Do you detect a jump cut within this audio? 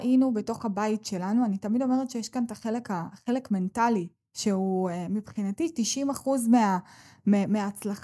no; 0 cuts

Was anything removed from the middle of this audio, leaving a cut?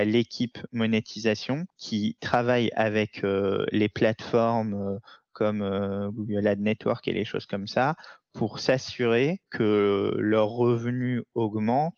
no; 0 cuts

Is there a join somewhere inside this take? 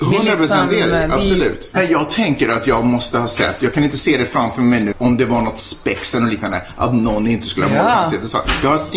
yes; 2 cuts; at 1.8 s, 4.9 s

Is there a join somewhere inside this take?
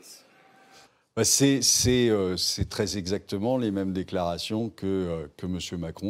no; 0 cuts

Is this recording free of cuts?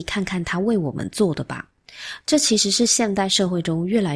no; 1 cut; at 2.2 s

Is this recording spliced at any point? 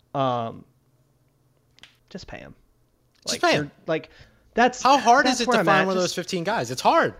yes; 1 cut; at 2.0 s

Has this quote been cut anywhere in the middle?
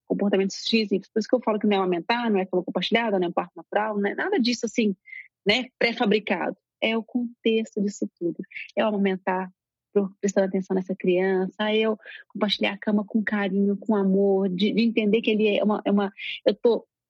no; 0 cuts

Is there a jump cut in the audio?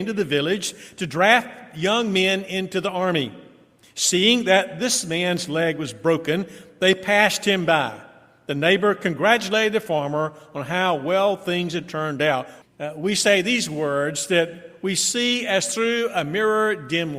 yes; 1 cut; at 12.6 s

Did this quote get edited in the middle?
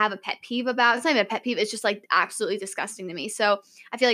no; 0 cuts

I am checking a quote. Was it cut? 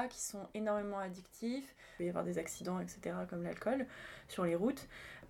no; 0 cuts

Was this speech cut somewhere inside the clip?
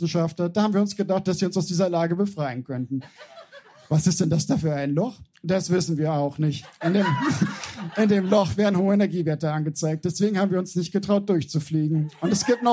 no; 0 cuts

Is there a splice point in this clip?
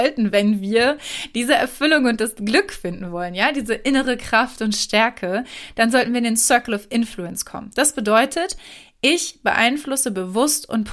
no; 0 cuts

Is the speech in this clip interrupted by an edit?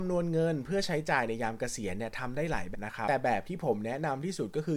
yes; 1 cut; at 2.7 s

